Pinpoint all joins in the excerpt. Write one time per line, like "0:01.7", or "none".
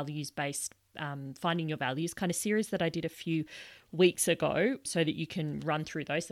0:04.9

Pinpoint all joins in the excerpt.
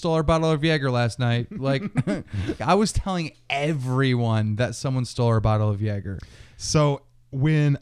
0:02.6

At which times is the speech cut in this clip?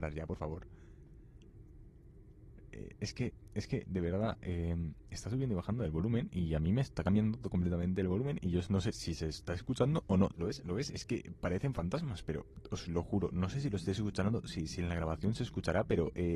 0:10.3

